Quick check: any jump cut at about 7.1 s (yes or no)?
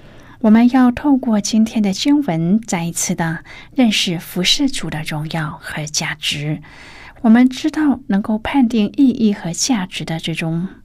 yes